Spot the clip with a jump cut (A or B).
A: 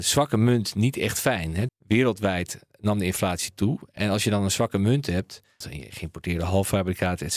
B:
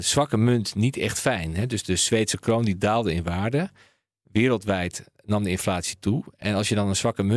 A